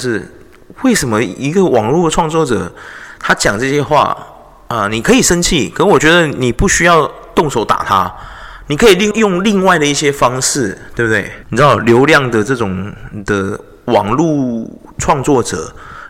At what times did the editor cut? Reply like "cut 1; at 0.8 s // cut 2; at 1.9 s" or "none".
cut 1; at 9.1 s // cut 2; at 11.4 s